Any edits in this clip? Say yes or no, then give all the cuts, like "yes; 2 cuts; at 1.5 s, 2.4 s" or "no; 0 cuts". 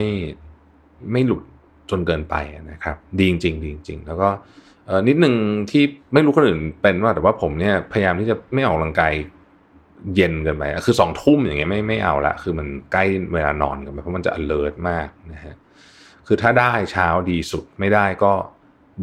no; 0 cuts